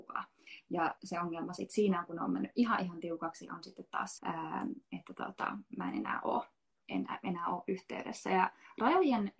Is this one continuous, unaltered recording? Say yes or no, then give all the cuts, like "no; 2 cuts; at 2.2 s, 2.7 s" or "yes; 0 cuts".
no; 2 cuts; at 1.0 s, 4.2 s